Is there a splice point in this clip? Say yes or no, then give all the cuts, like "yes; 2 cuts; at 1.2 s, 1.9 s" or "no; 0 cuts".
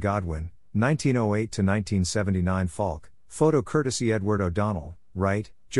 no; 0 cuts